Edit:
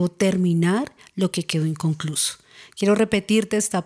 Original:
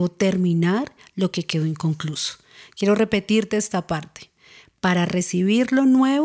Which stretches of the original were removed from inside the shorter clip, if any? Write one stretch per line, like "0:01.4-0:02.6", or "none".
none